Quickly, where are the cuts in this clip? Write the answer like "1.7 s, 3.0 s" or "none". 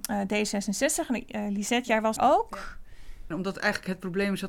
2.2 s, 3.3 s